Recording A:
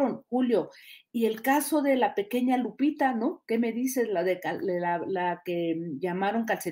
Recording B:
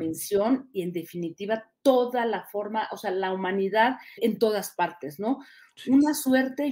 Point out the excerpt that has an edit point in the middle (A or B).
B